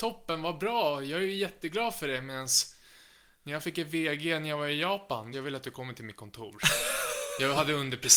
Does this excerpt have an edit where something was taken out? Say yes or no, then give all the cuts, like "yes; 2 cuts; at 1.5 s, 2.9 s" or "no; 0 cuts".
yes; 1 cut; at 5.3 s